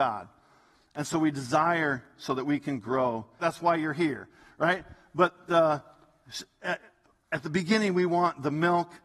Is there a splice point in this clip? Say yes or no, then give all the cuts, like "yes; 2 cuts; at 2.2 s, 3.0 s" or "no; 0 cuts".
yes; 1 cut; at 3.4 s